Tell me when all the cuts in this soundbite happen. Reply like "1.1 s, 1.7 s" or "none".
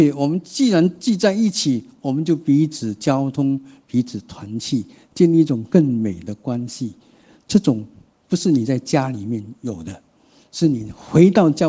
none